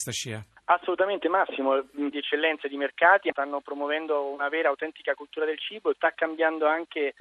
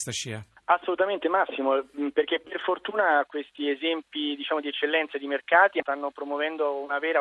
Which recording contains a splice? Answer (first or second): first